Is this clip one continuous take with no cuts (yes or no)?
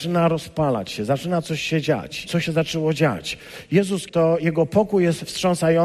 no